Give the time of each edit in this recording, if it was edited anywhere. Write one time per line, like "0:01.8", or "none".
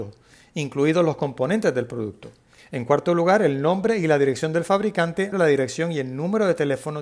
0:02.6
0:05.3